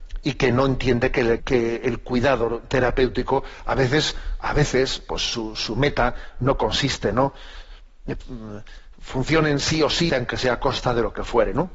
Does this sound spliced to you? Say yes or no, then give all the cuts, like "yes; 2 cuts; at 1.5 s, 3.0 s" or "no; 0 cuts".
yes; 3 cuts; at 1.4 s, 8.2 s, 10.1 s